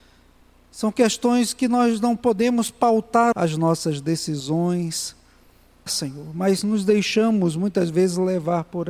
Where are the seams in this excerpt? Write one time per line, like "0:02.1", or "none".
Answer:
0:03.3
0:05.9